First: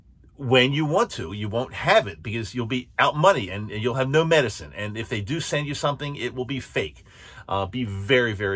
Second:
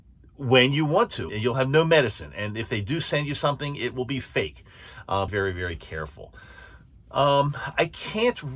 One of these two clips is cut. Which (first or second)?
second